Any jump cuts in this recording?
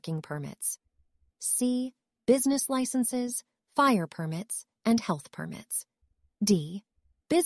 no; 0 cuts

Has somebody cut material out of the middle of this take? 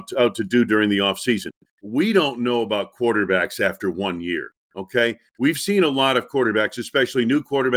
yes; 1 cut; at 1.7 s

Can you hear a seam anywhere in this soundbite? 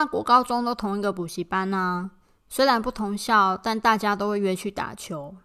no; 0 cuts

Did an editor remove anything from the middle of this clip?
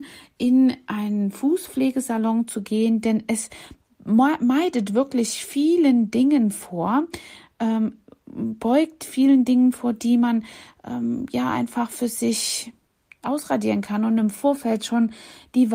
no; 0 cuts

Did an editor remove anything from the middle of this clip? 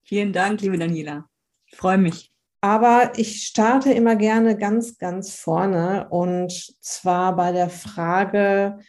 yes; 1 cut; at 2.5 s

